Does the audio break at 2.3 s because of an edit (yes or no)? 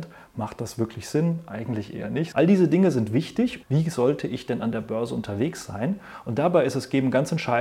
yes